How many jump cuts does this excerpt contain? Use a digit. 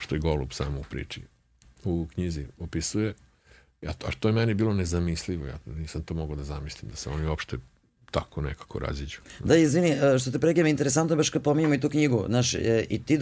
0